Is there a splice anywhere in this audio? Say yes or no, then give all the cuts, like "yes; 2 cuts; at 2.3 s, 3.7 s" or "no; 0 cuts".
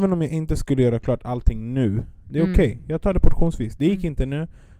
no; 0 cuts